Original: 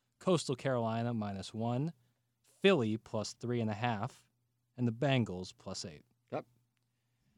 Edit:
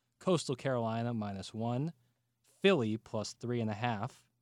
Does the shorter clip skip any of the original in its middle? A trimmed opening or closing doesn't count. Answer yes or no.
no